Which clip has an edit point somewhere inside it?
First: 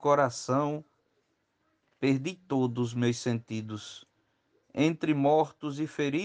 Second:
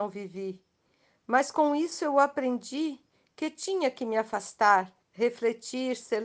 second; 1 cut; at 5.0 s

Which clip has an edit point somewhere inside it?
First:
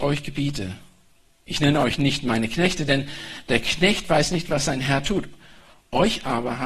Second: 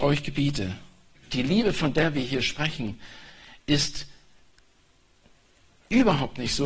second; 1 cut; at 1.2 s

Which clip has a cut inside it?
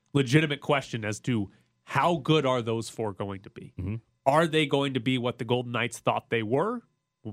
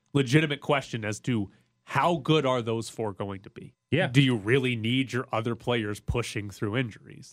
second; 1 cut; at 3.7 s

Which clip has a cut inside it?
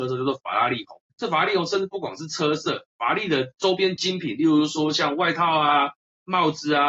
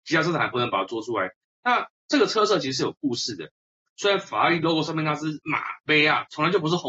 second; 1 cut; at 3.8 s

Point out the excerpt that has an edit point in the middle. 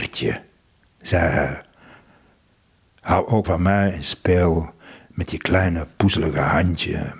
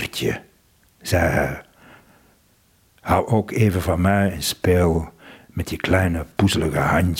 first; 1 cut; at 3.4 s

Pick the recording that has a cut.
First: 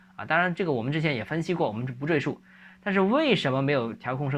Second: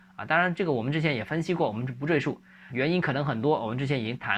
second; 1 cut; at 2.7 s

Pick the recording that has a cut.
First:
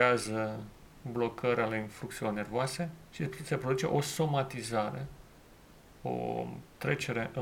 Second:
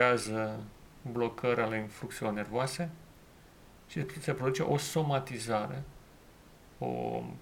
first; 1 cut; at 3.1 s

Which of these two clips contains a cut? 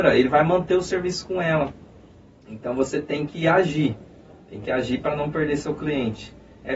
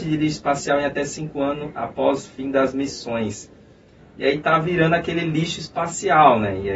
second; 1 cut; at 4.0 s

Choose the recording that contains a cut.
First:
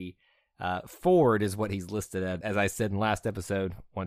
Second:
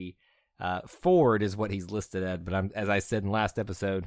first; 1 cut; at 2.4 s

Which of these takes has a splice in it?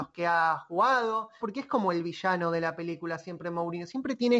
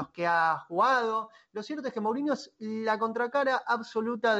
first; 1 cut; at 1.4 s

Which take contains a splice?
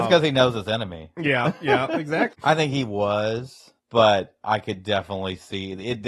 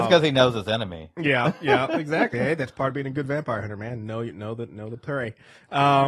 first; 2 cuts; at 2.3 s, 3.8 s

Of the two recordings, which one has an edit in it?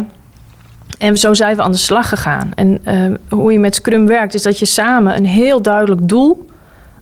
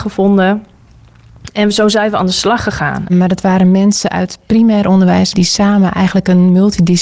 second; 2 cuts; at 3.1 s, 5.3 s

